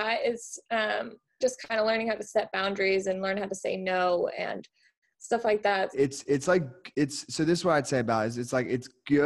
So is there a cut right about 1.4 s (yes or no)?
yes